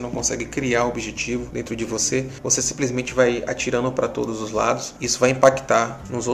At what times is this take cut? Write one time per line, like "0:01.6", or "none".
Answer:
none